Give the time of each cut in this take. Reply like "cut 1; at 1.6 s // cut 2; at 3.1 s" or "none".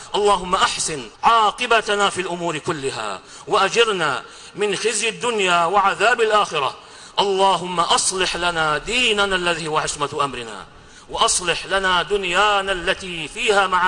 cut 1; at 1.1 s